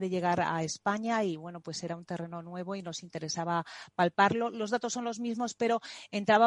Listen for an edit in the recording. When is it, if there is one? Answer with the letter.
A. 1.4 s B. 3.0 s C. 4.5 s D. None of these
D